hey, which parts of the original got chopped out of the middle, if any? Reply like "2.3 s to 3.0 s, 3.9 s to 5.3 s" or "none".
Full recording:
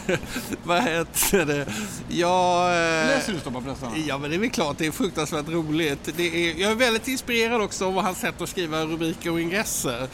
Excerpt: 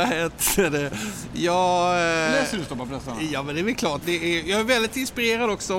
4.8 s to 6.1 s

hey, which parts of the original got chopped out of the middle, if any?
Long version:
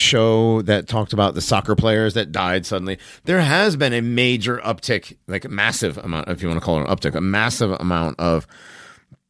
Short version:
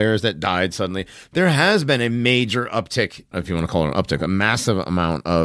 5.2 s to 6.2 s

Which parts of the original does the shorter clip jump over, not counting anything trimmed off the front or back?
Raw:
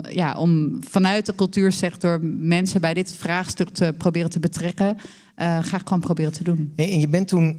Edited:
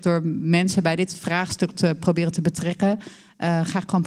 none

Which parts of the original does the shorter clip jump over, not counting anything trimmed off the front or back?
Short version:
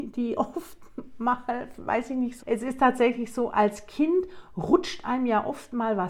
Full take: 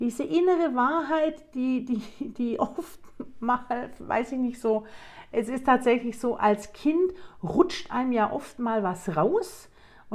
4.6 s to 5.3 s

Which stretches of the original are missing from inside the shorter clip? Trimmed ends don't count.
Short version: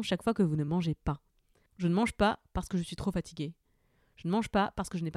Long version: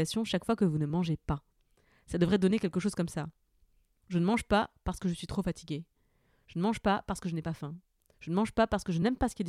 1.9 s to 4.0 s

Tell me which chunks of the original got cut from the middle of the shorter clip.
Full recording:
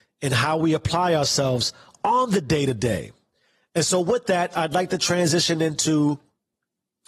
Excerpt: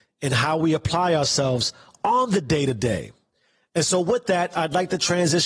none

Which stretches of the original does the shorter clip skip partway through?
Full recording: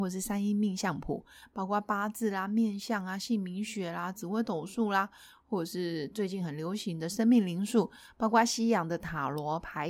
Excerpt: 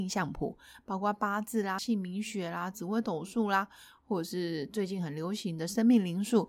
2.5 s to 3.2 s

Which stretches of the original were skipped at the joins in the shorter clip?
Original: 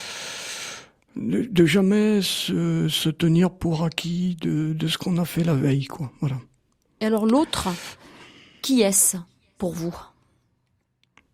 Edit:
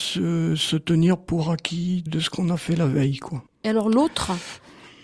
4.4 s to 4.7 s, 6.1 s to 6.8 s

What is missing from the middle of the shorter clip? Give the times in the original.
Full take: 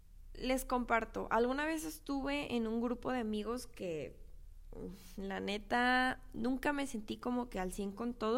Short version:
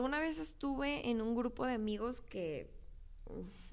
none

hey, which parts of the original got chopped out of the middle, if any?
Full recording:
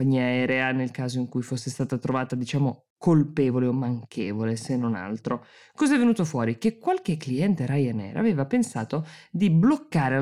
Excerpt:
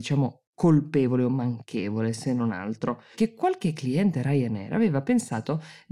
5.6 s to 6.6 s

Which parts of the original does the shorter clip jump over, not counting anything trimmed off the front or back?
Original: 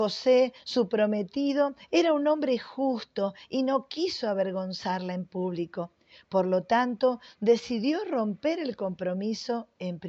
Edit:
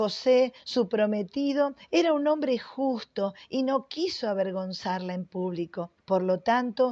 6.0 s to 6.2 s

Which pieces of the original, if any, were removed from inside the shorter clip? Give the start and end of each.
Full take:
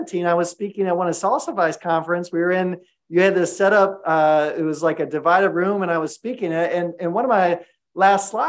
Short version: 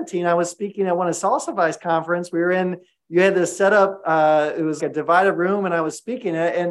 4.8 s to 5.0 s

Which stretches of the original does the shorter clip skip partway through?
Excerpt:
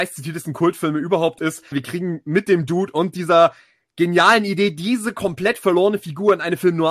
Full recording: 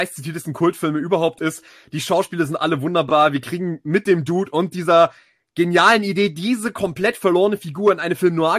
1.7 s to 3.3 s

